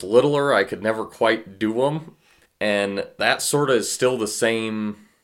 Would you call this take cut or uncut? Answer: cut